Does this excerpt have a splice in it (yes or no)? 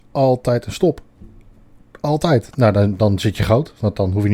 yes